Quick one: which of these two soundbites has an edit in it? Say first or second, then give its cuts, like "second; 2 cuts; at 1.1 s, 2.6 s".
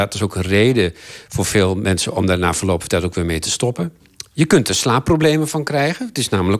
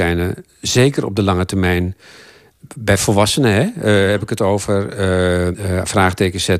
second; 1 cut; at 5.5 s